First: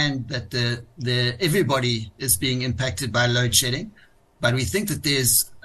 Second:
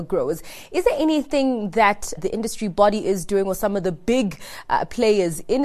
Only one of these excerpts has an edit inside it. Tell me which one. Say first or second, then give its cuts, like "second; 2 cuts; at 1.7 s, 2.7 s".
second; 1 cut; at 2.2 s